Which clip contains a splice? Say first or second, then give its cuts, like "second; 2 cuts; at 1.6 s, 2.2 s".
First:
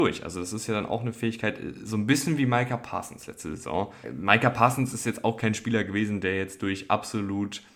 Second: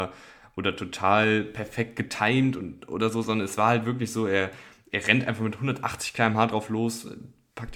first; 1 cut; at 4.0 s